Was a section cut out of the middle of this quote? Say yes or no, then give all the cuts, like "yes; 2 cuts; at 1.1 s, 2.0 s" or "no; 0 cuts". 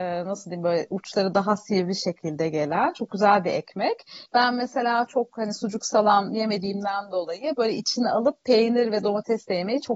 yes; 1 cut; at 4.3 s